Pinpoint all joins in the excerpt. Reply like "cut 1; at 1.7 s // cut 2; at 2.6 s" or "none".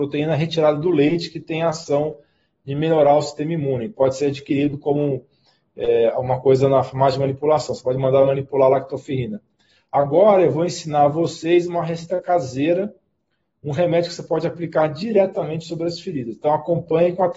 none

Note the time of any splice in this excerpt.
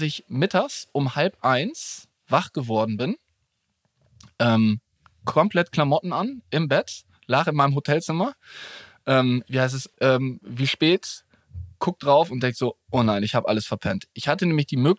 cut 1; at 9.9 s

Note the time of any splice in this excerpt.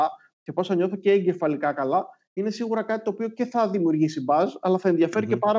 none

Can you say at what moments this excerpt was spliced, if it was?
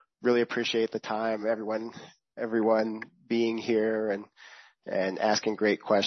none

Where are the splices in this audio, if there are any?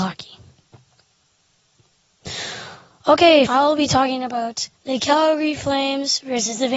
cut 1; at 3.5 s // cut 2; at 4.7 s

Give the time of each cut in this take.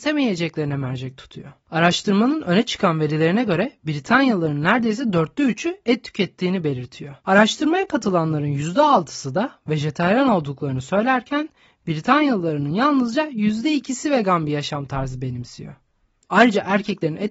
cut 1; at 7.2 s // cut 2; at 16.2 s

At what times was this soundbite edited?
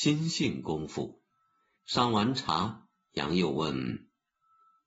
cut 1; at 1.8 s

